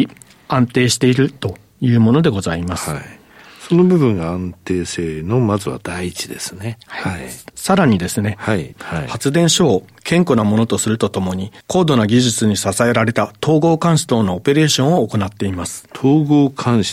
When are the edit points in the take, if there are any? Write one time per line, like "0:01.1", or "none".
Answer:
0:07.5
0:08.7
0:11.6